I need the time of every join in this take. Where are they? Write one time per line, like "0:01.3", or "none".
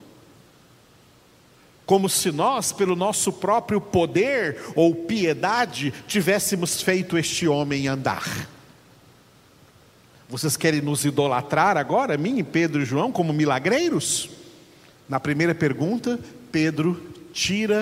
0:15.1